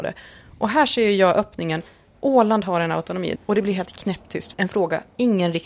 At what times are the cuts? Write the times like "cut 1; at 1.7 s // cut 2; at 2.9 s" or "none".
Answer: cut 1; at 3.4 s // cut 2; at 4.5 s